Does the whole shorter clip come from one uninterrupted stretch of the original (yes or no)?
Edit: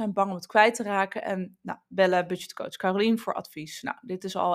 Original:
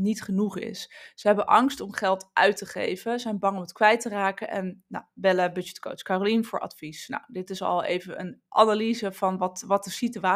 yes